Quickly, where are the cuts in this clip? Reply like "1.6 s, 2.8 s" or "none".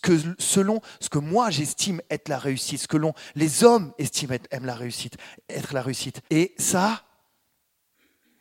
6.3 s